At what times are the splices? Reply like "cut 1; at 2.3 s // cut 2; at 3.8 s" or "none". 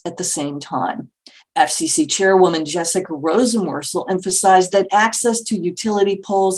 cut 1; at 1.4 s